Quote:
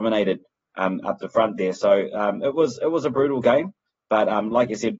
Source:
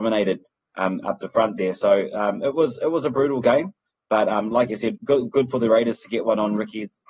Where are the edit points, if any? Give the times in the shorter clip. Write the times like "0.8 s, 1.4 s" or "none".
none